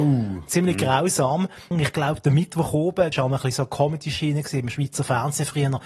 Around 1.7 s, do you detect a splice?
yes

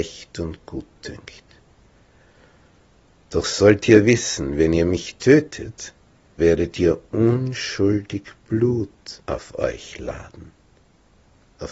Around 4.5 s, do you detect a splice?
no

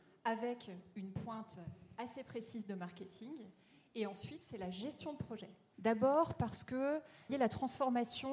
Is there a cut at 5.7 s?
yes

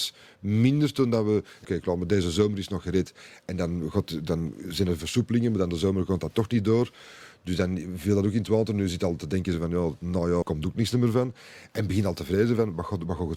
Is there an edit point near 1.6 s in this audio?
yes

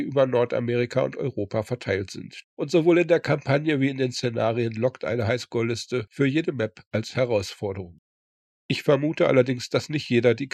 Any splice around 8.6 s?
yes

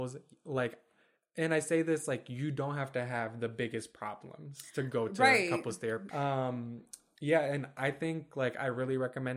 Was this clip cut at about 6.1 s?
yes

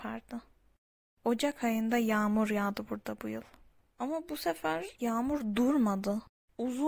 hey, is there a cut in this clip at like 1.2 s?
no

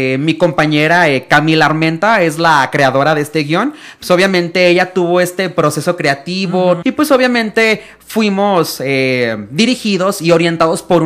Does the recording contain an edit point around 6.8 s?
yes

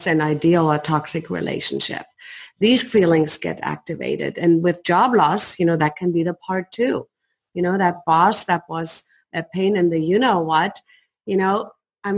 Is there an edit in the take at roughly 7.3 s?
no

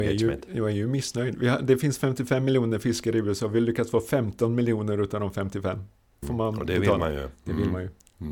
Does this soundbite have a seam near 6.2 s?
yes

